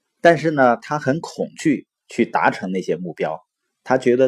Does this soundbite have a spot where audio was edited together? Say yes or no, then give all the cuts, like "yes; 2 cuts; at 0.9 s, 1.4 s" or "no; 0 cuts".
no; 0 cuts